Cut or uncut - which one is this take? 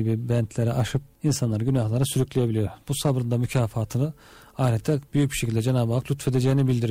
cut